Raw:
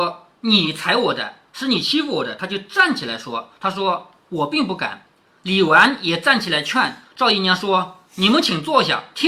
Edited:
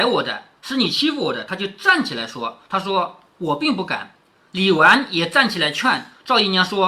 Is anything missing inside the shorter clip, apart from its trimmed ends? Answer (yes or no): no